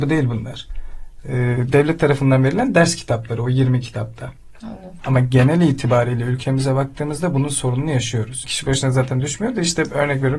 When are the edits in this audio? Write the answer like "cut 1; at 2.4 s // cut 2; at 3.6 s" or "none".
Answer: cut 1; at 5.0 s // cut 2; at 8.4 s